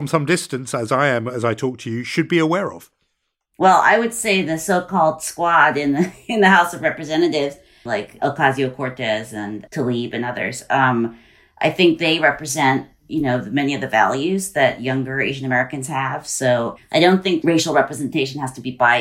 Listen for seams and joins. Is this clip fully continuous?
no; 2 cuts; at 7.9 s, 9.7 s

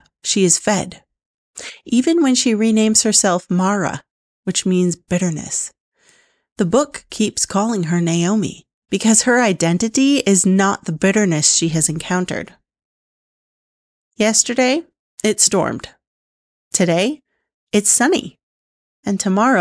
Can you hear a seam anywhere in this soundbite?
no; 0 cuts

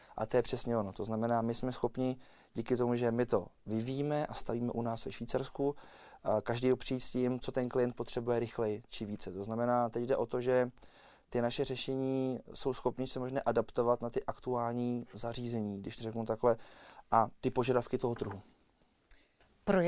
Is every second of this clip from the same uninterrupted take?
yes; 0 cuts

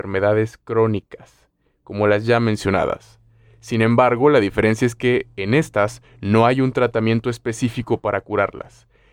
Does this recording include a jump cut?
no; 0 cuts

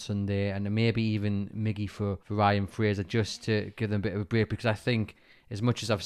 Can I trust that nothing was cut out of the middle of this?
no; 1 cut; at 2.2 s

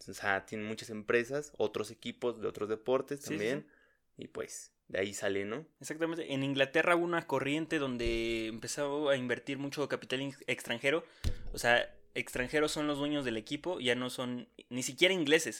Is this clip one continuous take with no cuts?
yes; 0 cuts

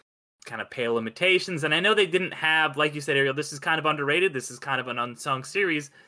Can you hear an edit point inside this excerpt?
no; 0 cuts

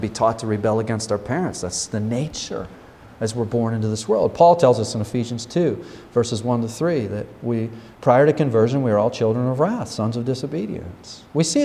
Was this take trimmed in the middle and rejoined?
no; 0 cuts

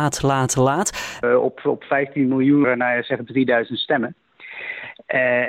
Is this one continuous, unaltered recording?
no; 2 cuts; at 1.2 s, 2.6 s

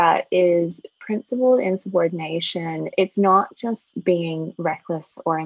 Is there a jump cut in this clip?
no; 0 cuts

